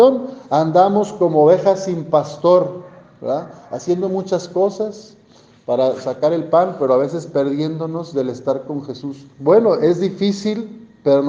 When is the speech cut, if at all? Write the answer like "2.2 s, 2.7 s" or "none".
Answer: 9.3 s